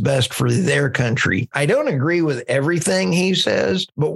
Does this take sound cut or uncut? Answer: cut